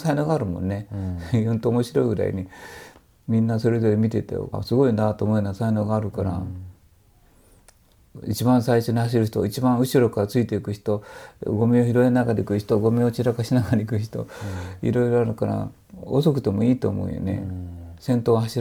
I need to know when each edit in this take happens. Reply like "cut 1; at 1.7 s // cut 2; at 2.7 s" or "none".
cut 1; at 4.5 s